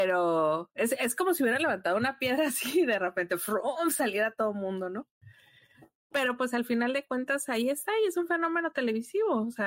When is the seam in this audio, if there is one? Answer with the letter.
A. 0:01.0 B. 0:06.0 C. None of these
C